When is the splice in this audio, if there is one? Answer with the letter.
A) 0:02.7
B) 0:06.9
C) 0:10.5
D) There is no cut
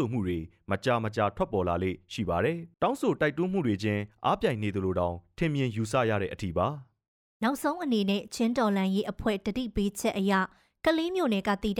A